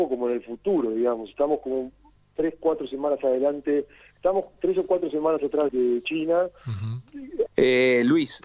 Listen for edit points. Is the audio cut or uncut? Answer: cut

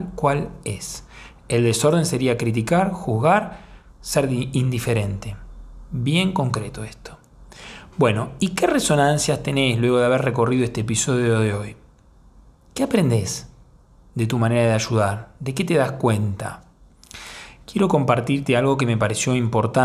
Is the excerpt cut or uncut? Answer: uncut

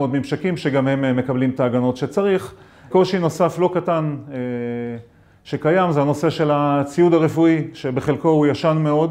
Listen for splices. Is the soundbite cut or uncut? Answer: cut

